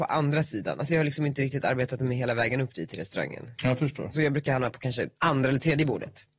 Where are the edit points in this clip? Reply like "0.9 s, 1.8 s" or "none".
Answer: 5.1 s